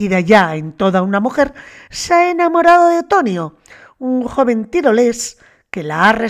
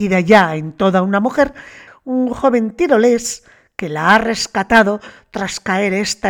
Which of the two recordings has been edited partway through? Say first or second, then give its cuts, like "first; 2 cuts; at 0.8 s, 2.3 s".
second; 1 cut; at 1.9 s